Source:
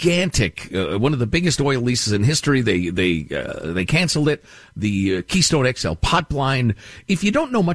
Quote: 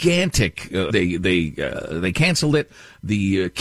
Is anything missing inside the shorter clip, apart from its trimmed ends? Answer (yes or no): yes